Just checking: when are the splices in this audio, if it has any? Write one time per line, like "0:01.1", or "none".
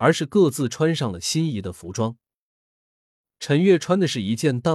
none